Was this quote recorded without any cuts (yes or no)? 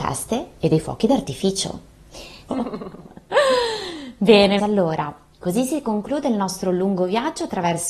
no